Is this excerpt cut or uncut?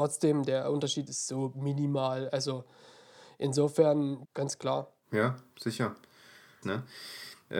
cut